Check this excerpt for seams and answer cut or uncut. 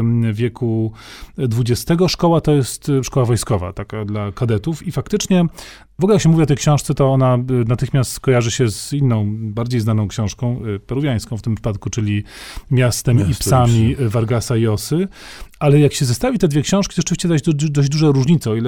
uncut